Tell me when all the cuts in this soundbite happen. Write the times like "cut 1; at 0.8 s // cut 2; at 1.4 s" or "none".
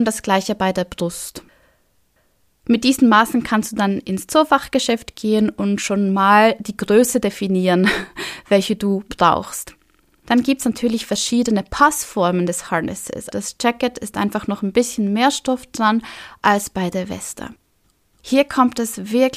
cut 1; at 13.3 s